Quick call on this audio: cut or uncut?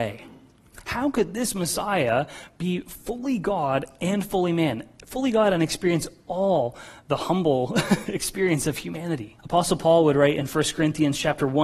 cut